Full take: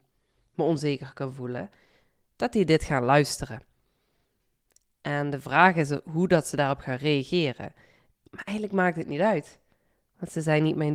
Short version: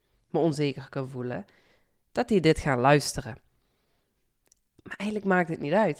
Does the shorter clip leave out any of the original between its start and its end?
yes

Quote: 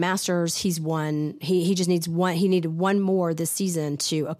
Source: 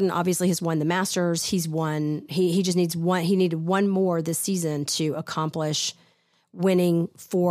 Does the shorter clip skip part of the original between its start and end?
no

